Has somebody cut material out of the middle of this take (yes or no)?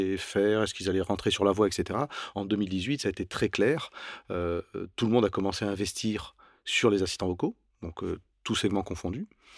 no